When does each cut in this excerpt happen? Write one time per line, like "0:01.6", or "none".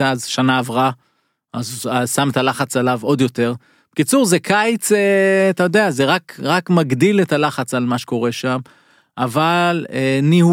none